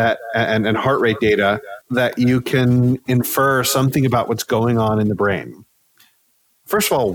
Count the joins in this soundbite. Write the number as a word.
one